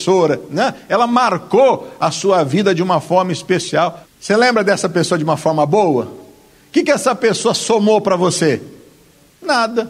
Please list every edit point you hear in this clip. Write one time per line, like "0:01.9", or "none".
0:04.0

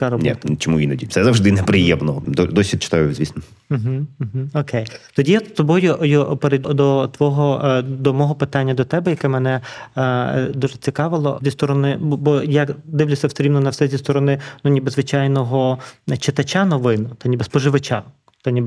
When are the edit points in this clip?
0:02.2
0:06.6

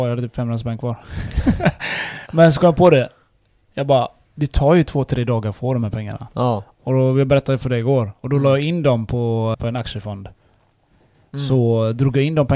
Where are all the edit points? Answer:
0:09.5

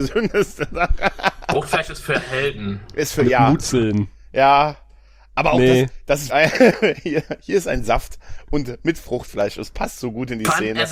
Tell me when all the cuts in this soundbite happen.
0:06.3

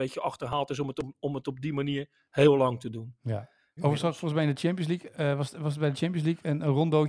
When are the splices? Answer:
0:03.8

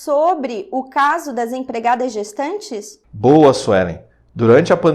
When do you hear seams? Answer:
none

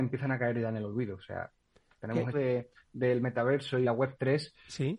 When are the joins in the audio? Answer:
0:02.3
0:03.8

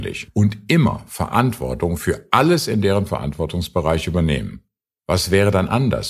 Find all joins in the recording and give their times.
0:05.0

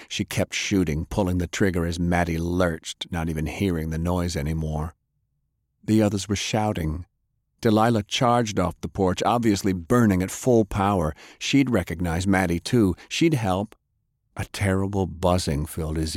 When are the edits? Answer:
0:14.2

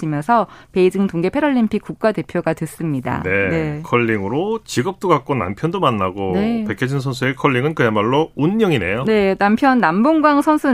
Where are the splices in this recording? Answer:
none

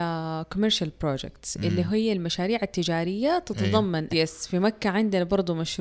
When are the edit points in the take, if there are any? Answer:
0:04.1

